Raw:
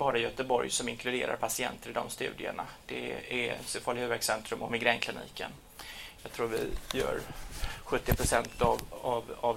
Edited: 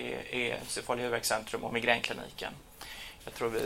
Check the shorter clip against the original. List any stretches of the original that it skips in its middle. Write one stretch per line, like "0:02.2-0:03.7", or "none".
none